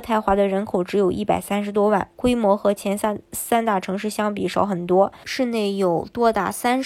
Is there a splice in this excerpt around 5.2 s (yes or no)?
yes